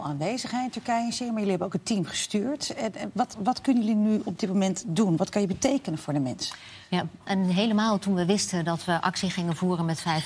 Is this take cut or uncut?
cut